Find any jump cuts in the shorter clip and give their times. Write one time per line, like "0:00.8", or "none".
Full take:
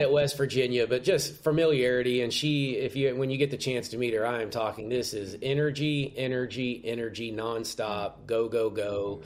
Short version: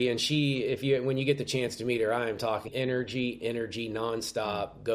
0:02.7